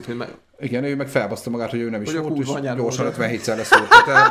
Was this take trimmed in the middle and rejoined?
no; 0 cuts

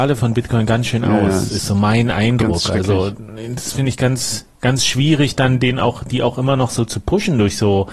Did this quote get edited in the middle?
no; 0 cuts

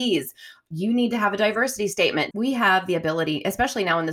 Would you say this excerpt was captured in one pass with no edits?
no; 1 cut; at 2.3 s

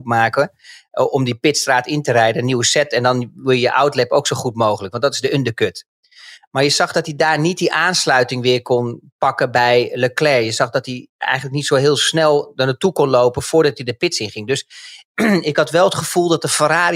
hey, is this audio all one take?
yes; 0 cuts

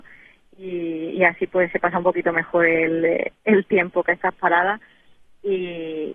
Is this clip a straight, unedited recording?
yes; 0 cuts

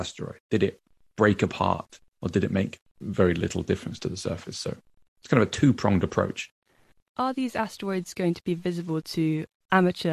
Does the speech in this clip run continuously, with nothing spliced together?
yes; 0 cuts

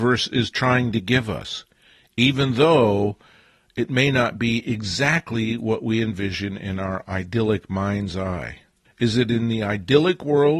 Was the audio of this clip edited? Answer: yes; 1 cut; at 8.9 s

